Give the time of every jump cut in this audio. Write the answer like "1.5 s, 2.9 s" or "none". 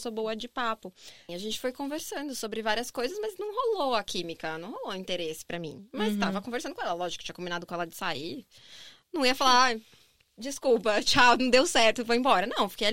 1.3 s